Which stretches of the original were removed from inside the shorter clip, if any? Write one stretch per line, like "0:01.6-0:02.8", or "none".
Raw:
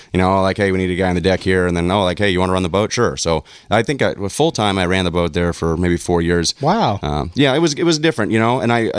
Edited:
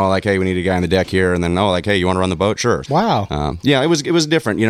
0:03.2-0:06.5